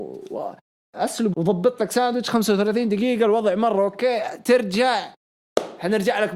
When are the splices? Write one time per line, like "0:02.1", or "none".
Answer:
0:01.3